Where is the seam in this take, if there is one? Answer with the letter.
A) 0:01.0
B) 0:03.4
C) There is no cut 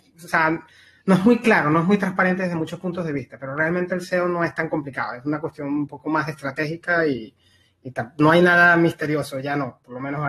C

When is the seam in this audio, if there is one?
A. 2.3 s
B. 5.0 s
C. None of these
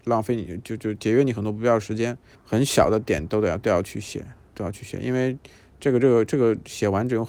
A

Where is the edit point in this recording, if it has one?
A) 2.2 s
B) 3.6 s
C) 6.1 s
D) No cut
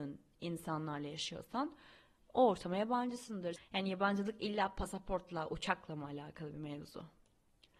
B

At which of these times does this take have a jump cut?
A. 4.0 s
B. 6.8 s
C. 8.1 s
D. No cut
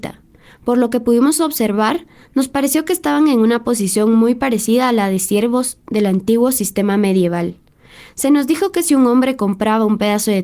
D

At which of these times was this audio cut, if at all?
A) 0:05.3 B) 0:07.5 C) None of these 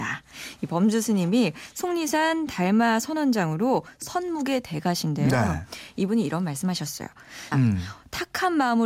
B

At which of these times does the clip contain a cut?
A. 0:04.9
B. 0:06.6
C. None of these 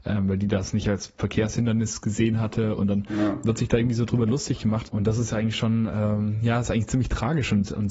A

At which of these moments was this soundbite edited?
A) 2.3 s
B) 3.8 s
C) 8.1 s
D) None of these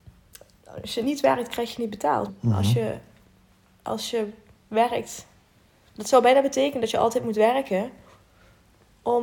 A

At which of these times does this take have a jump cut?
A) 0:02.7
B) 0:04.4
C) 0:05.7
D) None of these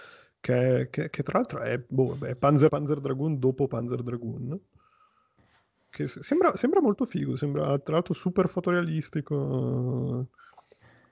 A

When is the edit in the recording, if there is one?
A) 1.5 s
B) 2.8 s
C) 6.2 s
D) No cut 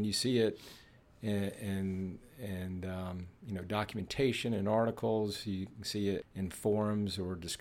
C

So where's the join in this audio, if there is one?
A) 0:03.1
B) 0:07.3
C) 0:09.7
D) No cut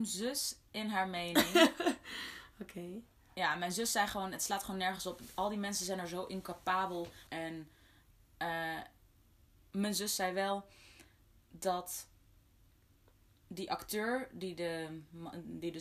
B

